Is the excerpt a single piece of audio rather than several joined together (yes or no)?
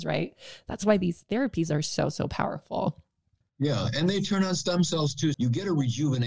no